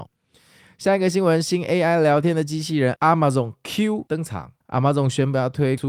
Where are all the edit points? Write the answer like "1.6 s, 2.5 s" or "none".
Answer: 4.6 s